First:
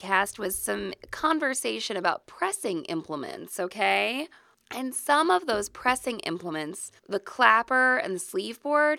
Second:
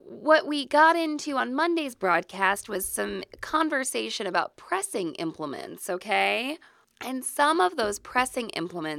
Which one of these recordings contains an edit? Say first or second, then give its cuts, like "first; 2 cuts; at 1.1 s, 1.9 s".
first; 1 cut; at 7.0 s